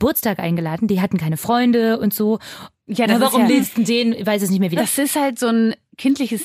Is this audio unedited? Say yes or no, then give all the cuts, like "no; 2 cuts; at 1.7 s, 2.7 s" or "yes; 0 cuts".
no; 2 cuts; at 2.9 s, 4.8 s